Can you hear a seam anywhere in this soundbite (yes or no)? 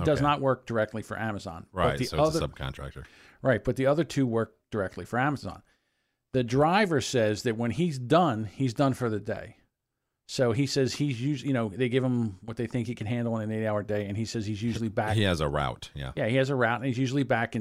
no